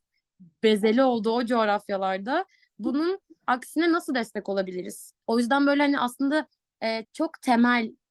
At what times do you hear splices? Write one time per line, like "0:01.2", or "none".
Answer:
0:05.2
0:07.0